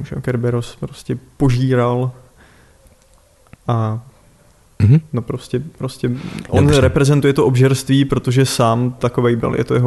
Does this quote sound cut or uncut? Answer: uncut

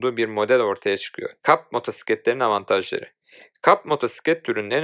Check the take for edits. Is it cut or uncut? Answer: cut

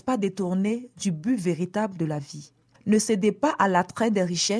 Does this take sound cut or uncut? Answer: cut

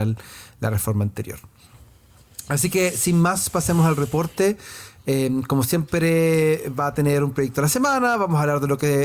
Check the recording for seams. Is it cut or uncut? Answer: uncut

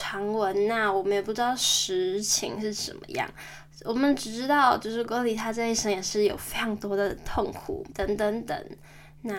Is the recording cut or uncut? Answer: cut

